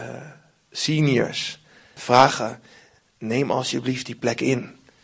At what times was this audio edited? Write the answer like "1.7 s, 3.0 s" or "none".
2.0 s